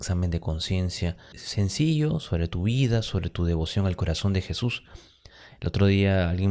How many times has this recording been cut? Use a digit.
1